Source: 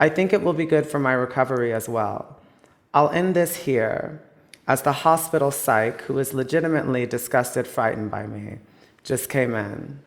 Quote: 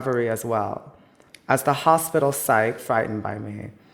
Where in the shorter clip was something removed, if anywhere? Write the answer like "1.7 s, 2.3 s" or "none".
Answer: 1.3 s, 2.8 s